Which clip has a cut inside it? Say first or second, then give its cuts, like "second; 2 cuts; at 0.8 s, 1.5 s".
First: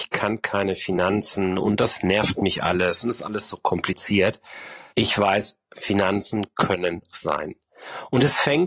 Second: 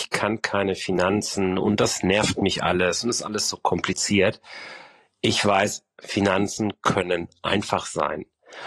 first; 2 cuts; at 4.9 s, 7.1 s